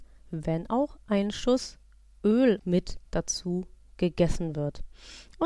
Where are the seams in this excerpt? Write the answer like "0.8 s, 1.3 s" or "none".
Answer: 2.6 s